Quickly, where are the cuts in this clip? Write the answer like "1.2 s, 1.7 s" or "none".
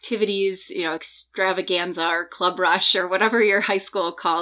none